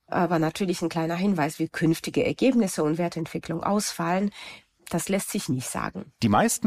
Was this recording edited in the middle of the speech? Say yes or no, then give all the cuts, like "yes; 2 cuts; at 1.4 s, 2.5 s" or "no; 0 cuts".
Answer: no; 0 cuts